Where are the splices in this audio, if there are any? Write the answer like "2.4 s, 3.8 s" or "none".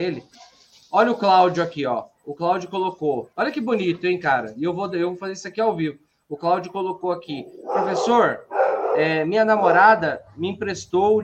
3.3 s